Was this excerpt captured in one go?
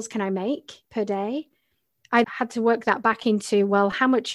no; 1 cut; at 2.2 s

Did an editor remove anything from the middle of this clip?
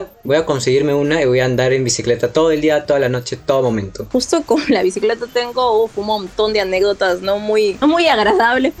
no; 0 cuts

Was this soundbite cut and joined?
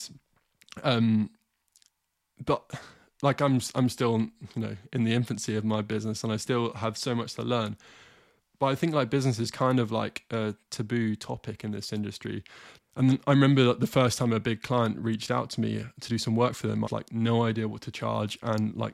yes; 2 cuts; at 12.8 s, 16.8 s

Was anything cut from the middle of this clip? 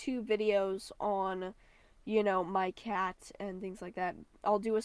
no; 0 cuts

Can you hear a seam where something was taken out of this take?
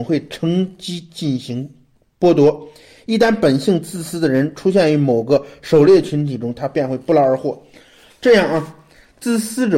no; 0 cuts

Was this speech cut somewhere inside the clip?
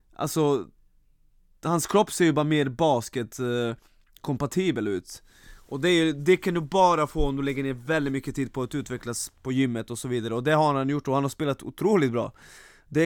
no; 0 cuts

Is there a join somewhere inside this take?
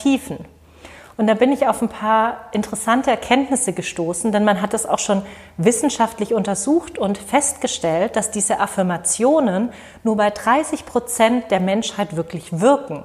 no; 0 cuts

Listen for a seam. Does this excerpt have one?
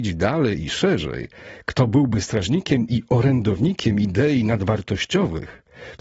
no; 0 cuts

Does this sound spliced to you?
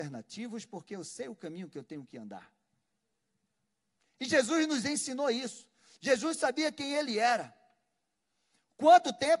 no; 0 cuts

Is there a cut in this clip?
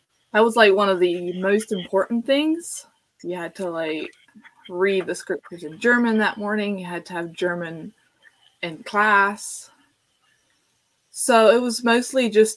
yes; 1 cut; at 3.1 s

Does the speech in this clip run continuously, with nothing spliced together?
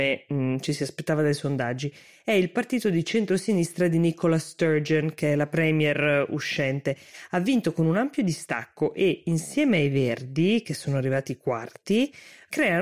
yes; 0 cuts

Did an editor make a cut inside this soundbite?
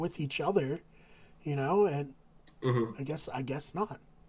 no; 0 cuts

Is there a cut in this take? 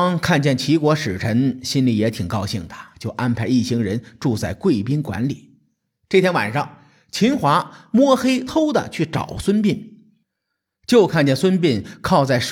yes; 1 cut; at 8.5 s

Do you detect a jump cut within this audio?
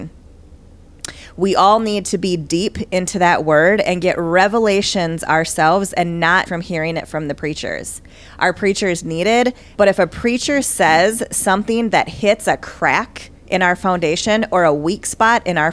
yes; 2 cuts; at 6.5 s, 9.7 s

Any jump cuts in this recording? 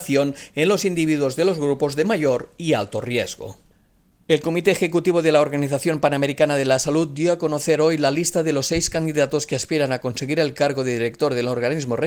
no; 0 cuts

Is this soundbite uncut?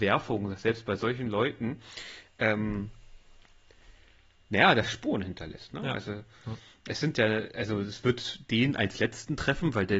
yes; 0 cuts

